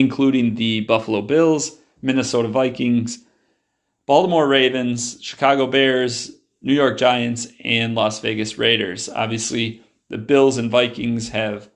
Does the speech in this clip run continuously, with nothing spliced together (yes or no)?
yes